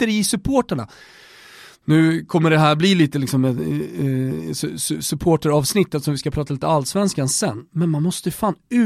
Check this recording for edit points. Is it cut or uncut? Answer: uncut